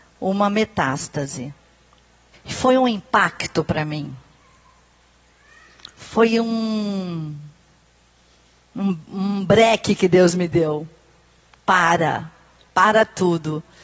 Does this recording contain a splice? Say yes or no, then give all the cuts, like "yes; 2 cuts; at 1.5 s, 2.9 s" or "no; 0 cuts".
yes; 1 cut; at 2.3 s